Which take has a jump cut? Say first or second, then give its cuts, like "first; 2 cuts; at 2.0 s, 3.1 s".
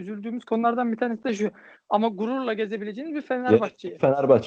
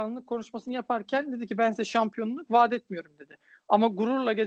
first; 1 cut; at 1.7 s